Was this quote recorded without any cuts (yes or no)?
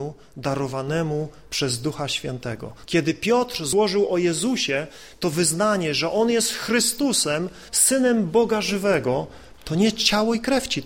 no